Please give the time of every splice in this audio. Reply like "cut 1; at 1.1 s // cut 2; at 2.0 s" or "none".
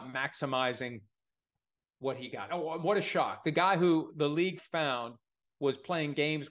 none